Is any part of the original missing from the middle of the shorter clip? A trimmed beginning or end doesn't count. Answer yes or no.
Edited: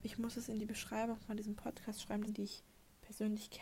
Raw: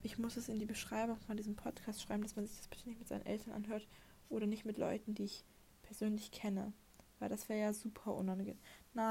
yes